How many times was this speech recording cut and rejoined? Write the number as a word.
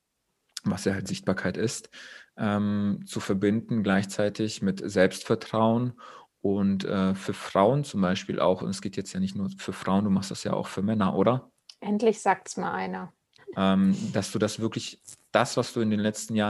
two